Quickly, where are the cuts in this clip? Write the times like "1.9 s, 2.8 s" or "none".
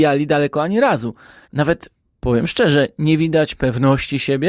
1.4 s